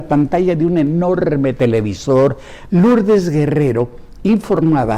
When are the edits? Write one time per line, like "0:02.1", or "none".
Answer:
0:02.7